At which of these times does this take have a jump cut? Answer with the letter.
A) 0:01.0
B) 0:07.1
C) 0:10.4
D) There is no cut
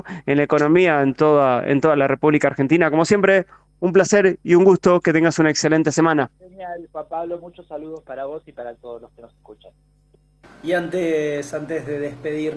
C